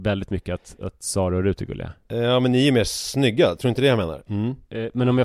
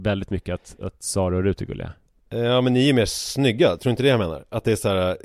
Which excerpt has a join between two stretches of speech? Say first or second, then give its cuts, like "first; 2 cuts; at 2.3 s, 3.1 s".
first; 2 cuts; at 2.0 s, 4.3 s